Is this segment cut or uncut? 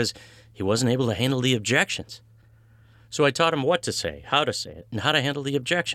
uncut